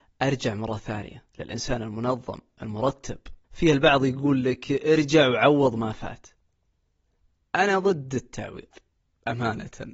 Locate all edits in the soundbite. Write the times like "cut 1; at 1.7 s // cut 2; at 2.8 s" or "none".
cut 1; at 1.3 s // cut 2; at 3.4 s